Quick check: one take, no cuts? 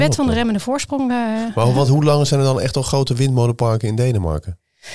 yes; 0 cuts

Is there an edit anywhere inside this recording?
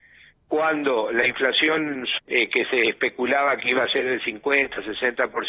yes; 1 cut; at 2.2 s

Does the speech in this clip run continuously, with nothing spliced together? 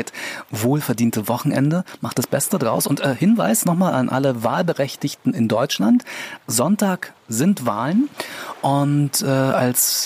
yes; 0 cuts

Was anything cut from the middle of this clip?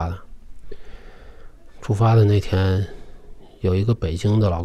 no; 0 cuts

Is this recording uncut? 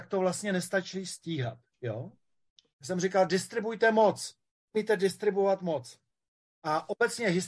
no; 1 cut; at 2.7 s

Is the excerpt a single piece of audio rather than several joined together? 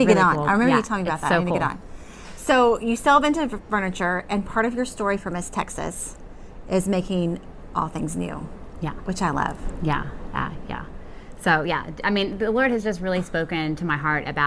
yes; 0 cuts

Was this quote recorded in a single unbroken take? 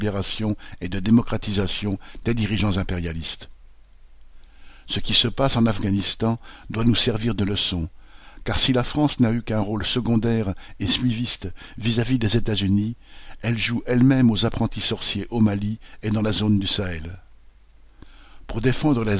yes; 0 cuts

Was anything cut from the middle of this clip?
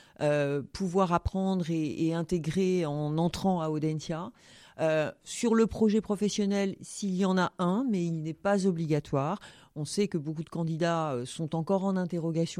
no; 0 cuts

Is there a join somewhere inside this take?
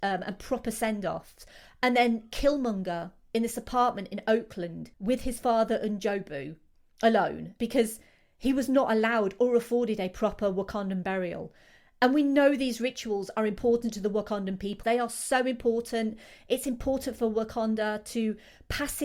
yes; 2 cuts; at 4.9 s, 14.8 s

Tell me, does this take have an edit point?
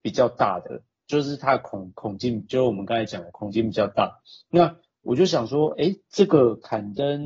no; 0 cuts

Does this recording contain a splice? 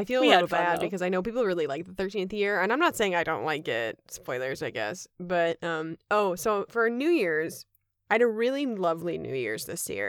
no; 0 cuts

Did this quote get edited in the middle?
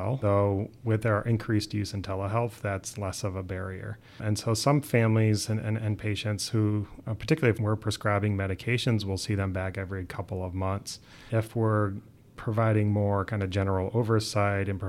no; 0 cuts

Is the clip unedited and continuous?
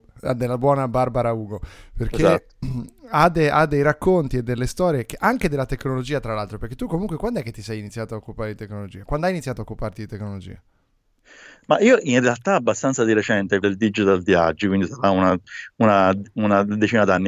no; 1 cut; at 13.6 s

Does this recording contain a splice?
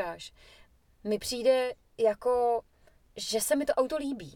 no; 0 cuts

